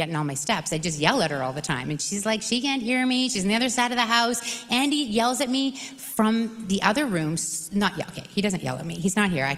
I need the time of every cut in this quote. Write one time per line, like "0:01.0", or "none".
none